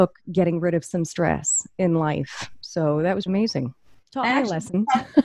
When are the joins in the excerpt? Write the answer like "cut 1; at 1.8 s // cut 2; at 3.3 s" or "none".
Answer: cut 1; at 3.3 s